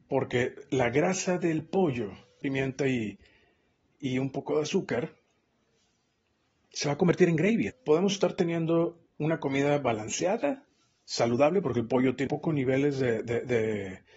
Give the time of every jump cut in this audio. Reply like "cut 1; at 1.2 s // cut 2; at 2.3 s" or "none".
cut 1; at 2.4 s // cut 2; at 7.7 s // cut 3; at 12.3 s